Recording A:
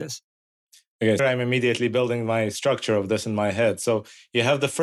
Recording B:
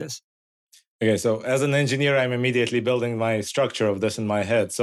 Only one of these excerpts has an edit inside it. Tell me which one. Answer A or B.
A